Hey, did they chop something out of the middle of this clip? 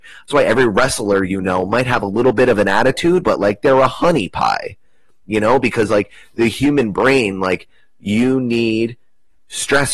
no; 0 cuts

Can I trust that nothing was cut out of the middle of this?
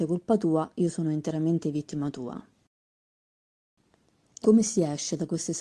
no; 1 cut; at 4.4 s

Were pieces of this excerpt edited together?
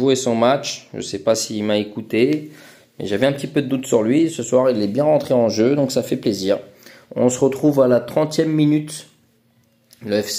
no; 0 cuts

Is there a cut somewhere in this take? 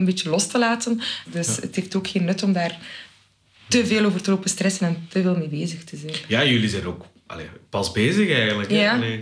yes; 1 cut; at 1.2 s

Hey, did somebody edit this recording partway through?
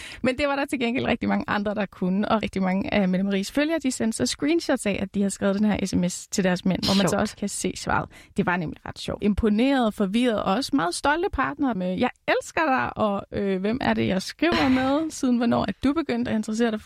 yes; 3 cuts; at 2.4 s, 9.2 s, 11.8 s

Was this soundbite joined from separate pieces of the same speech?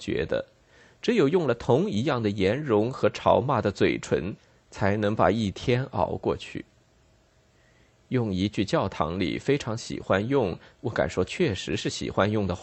no; 0 cuts

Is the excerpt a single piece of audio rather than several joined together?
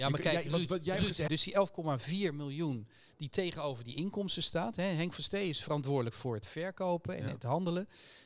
no; 1 cut; at 1.3 s

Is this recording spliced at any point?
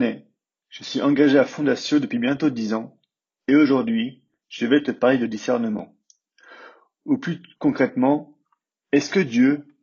no; 0 cuts

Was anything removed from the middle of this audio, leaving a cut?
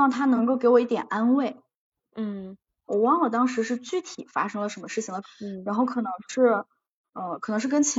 yes; 2 cuts; at 2.9 s, 5.2 s

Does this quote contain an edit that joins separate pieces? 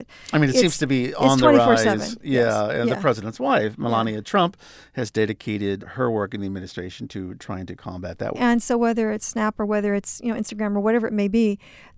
yes; 2 cuts; at 5.8 s, 8.3 s

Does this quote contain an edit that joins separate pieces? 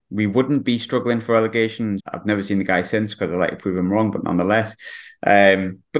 yes; 1 cut; at 2.0 s

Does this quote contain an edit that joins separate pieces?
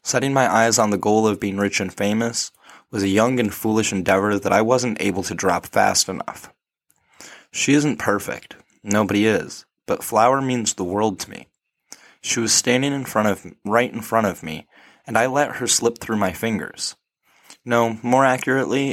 no; 0 cuts

